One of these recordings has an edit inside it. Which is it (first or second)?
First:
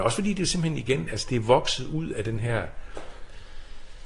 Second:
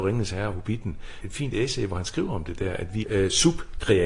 second